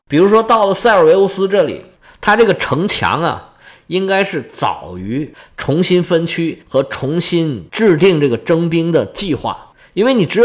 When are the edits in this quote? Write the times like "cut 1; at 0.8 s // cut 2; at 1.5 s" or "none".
none